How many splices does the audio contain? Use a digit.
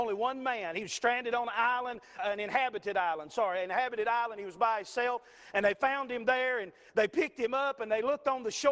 1